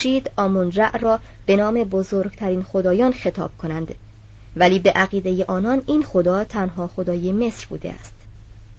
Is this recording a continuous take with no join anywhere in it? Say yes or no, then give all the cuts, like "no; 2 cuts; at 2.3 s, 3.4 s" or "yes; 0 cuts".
yes; 0 cuts